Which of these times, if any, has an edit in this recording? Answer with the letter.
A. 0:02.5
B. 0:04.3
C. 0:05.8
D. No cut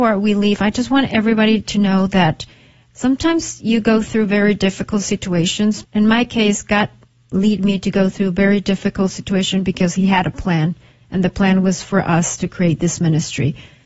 C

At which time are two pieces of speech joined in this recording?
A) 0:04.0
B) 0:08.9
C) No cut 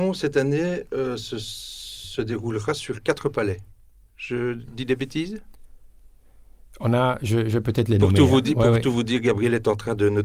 C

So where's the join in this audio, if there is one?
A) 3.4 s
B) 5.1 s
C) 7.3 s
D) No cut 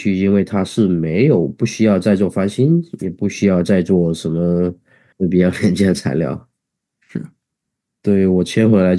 B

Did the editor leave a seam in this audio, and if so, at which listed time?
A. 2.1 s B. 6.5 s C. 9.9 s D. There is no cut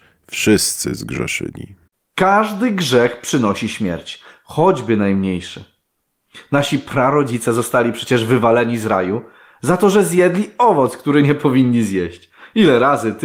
D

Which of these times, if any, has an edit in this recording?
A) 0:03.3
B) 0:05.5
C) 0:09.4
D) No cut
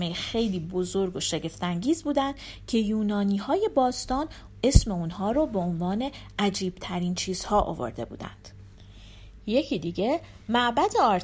C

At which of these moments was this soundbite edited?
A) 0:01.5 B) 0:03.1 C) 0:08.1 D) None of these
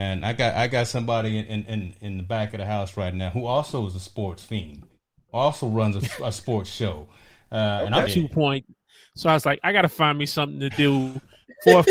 C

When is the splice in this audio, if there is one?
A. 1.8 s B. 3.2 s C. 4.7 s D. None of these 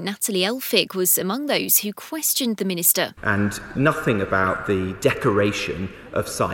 B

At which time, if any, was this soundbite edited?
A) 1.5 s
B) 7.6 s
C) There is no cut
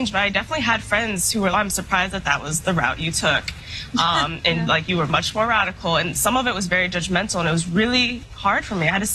A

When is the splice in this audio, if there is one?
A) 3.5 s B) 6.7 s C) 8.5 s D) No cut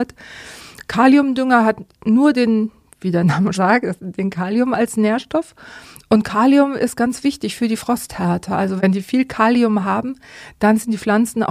A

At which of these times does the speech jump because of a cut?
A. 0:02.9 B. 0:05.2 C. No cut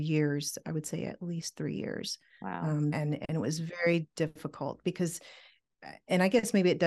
A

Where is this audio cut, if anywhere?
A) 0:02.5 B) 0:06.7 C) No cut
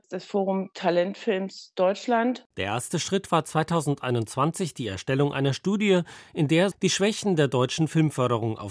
B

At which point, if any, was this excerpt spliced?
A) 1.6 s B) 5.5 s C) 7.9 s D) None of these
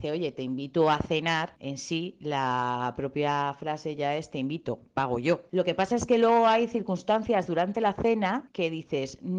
D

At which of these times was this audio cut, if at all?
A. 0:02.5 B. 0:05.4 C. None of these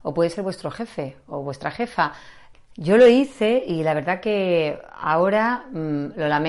A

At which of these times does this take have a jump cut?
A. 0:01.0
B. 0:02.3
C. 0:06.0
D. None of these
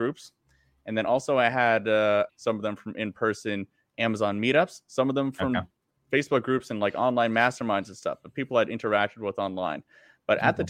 B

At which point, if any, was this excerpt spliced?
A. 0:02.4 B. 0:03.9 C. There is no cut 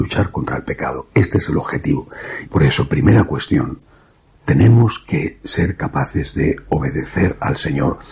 A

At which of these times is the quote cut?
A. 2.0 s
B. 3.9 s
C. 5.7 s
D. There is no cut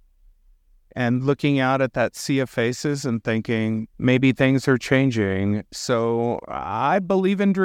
B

